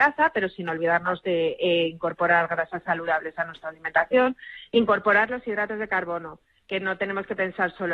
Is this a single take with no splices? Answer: yes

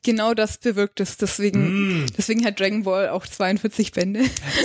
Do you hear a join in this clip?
no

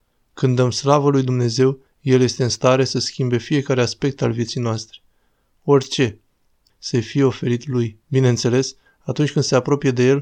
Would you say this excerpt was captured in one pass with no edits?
no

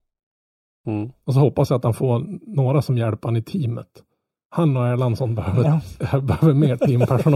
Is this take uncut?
yes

